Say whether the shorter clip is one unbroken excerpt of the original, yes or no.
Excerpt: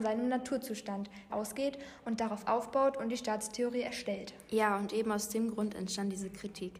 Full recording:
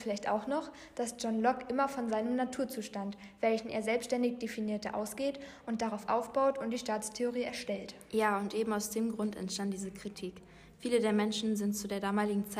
no